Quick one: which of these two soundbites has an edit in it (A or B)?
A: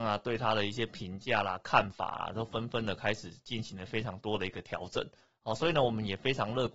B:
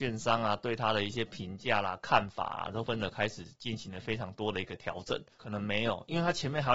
B